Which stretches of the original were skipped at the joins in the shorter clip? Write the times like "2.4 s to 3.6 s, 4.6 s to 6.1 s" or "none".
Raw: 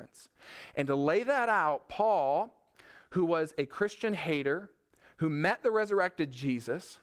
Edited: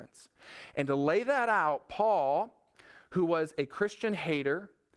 none